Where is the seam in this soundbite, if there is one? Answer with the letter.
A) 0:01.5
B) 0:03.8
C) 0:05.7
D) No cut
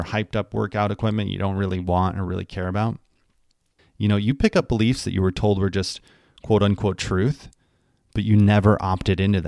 B